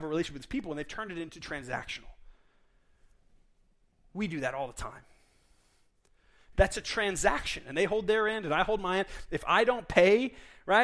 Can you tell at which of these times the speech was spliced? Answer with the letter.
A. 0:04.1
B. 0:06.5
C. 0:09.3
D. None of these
B